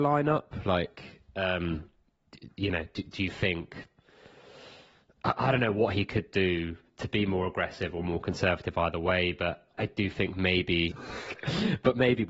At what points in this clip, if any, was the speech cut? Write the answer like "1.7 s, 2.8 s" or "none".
9.7 s, 10.9 s